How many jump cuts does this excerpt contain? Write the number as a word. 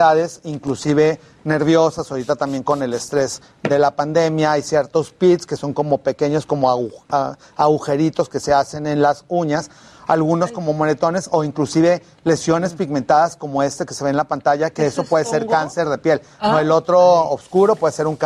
zero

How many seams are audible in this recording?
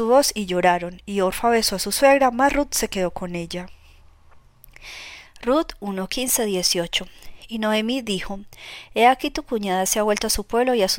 one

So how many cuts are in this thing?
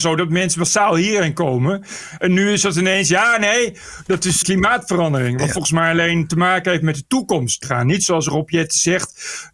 two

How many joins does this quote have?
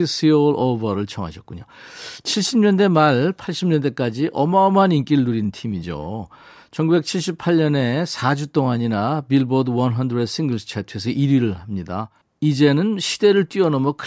zero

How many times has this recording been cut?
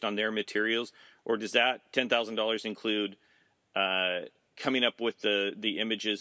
one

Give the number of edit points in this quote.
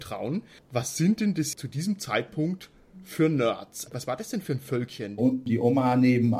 two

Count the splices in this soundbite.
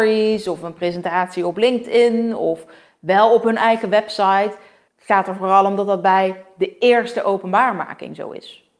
one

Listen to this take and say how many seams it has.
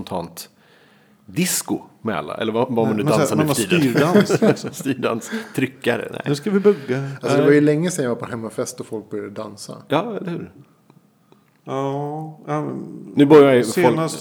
zero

